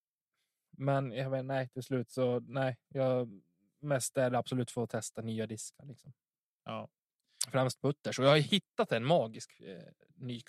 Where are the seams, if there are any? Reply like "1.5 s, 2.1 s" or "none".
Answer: none